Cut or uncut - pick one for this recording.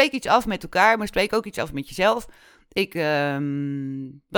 uncut